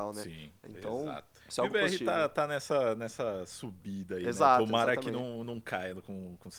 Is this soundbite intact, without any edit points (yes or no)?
no